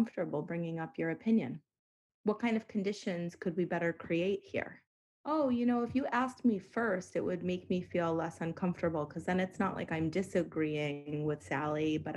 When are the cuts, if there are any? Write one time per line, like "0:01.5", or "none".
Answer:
none